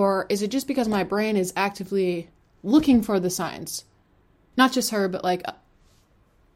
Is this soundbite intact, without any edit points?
no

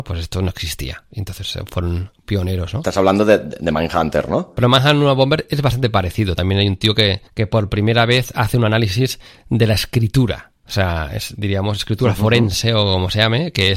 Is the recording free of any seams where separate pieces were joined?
yes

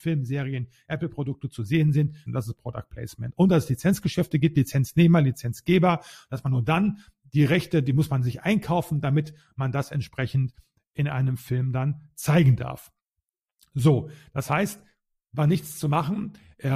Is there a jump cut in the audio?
yes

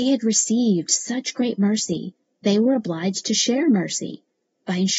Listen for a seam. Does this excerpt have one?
yes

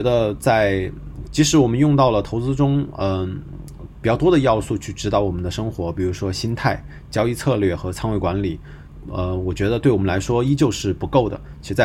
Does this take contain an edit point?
yes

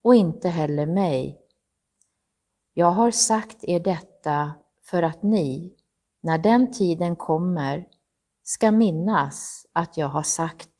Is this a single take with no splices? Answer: yes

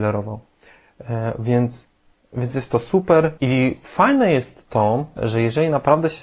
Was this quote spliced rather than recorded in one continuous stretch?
yes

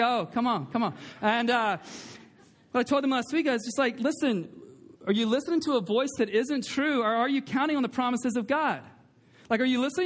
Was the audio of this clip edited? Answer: no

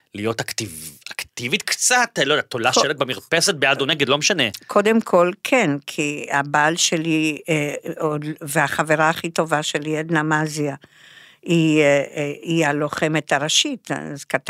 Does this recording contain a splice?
no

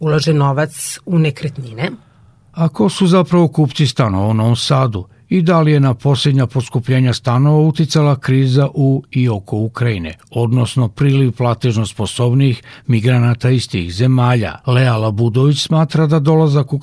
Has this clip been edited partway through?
yes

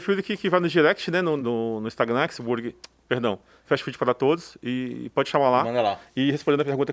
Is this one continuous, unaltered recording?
no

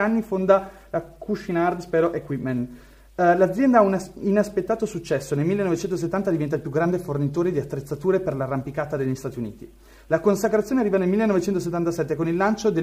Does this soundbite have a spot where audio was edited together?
no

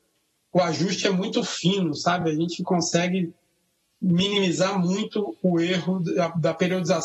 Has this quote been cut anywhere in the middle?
no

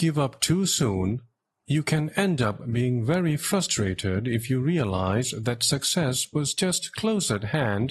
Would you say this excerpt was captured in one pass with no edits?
yes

